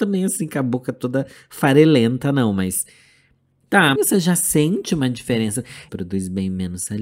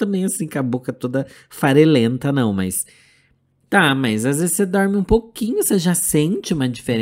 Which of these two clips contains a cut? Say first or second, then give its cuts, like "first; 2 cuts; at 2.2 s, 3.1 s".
first; 2 cuts; at 4.0 s, 5.9 s